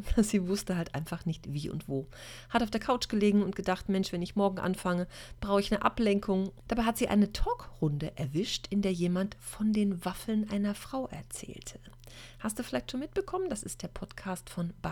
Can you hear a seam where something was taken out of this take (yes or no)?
yes